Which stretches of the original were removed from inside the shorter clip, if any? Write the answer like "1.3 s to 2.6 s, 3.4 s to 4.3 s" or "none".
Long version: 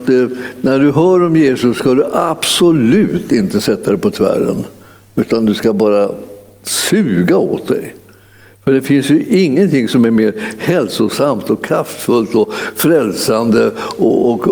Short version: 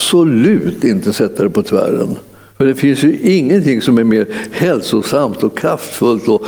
5.0 s to 8.6 s